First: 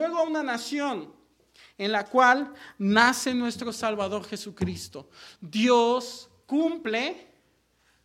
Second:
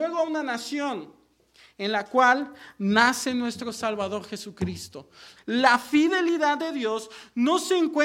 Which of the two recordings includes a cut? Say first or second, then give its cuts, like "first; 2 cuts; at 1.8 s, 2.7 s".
second; 1 cut; at 5.4 s